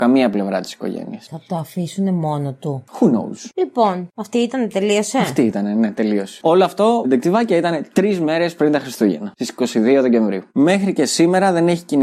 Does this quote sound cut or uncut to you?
cut